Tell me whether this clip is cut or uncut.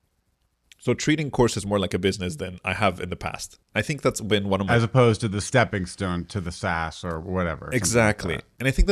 uncut